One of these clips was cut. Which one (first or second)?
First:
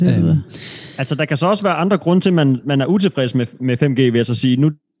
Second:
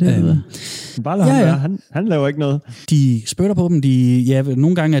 second